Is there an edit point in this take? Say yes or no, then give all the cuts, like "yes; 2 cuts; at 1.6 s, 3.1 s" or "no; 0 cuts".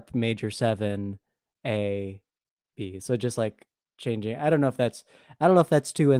no; 0 cuts